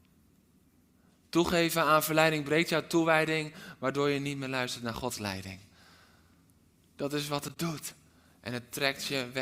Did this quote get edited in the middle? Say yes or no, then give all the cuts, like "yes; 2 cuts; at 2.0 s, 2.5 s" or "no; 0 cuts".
no; 0 cuts